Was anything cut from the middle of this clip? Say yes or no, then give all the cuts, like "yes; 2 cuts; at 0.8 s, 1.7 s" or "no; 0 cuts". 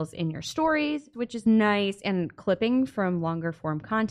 yes; 1 cut; at 1.1 s